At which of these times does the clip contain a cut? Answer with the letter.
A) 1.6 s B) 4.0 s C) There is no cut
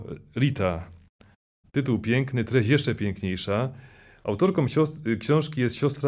A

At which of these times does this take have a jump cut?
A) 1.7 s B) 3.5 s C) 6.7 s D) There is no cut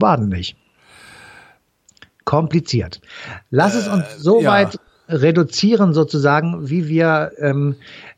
D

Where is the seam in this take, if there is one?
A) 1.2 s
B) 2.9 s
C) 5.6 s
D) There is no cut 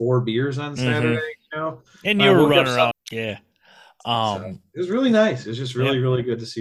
B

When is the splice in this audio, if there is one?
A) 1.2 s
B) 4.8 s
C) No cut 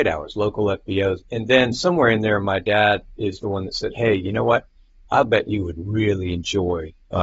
A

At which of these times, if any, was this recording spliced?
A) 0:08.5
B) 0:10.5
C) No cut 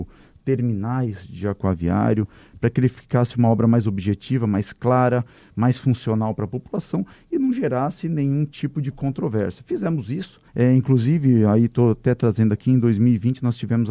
B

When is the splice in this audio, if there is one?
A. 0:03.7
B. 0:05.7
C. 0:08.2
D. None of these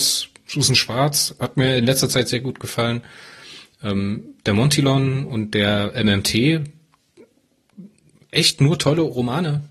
D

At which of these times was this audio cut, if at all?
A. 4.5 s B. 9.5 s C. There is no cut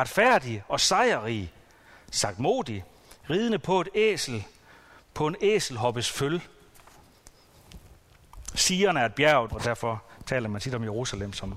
B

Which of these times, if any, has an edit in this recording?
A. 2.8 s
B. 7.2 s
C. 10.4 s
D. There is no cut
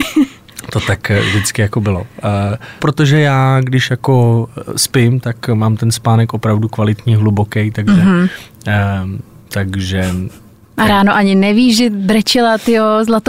A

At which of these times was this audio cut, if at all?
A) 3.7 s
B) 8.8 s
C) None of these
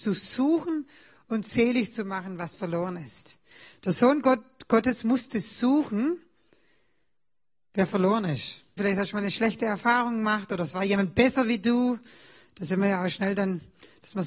B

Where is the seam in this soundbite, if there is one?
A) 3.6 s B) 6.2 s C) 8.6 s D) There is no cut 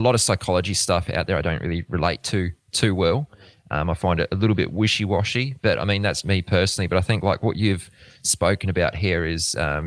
B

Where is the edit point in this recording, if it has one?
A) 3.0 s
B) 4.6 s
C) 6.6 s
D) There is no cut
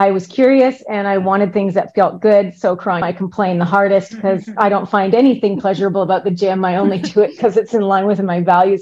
A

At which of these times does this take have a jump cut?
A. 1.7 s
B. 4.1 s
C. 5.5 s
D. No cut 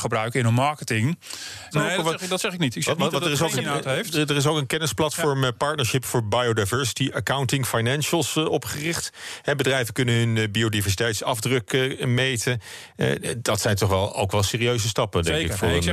A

